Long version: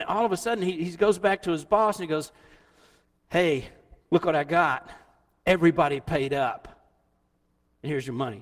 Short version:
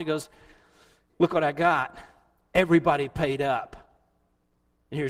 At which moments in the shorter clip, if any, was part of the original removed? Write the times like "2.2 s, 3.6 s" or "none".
1.1 s